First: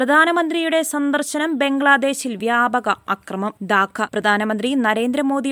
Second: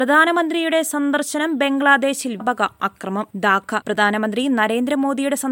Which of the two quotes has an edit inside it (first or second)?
second